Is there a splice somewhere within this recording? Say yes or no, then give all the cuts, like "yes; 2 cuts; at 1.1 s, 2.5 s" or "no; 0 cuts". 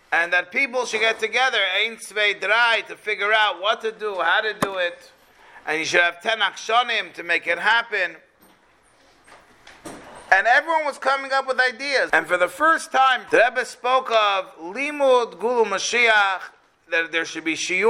yes; 2 cuts; at 12.1 s, 13.3 s